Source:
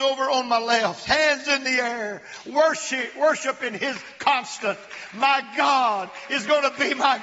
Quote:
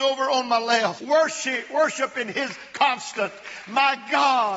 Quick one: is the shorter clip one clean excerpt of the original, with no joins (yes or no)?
no